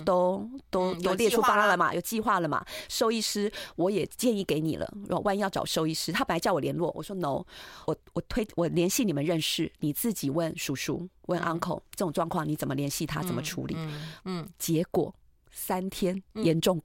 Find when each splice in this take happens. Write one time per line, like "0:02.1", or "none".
0:07.9
0:14.2